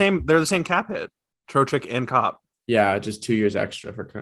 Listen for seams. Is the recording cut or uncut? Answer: uncut